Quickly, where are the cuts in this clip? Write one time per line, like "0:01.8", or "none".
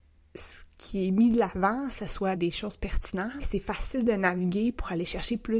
0:02.3
0:03.4